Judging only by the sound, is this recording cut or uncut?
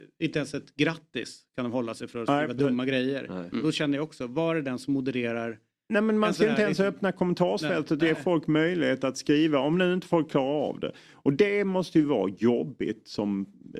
uncut